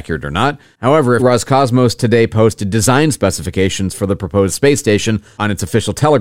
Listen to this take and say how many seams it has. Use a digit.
1